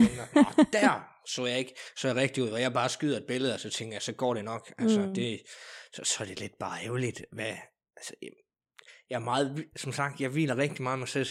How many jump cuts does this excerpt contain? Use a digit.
0